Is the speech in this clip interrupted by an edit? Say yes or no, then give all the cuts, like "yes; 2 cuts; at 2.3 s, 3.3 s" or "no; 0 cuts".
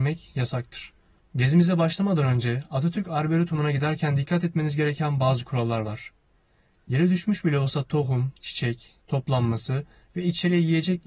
yes; 2 cuts; at 1.2 s, 9.0 s